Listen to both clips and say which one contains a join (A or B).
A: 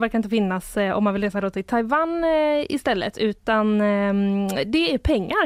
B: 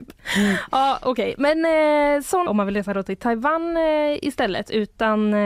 B